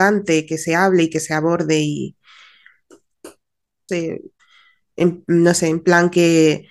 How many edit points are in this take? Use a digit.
1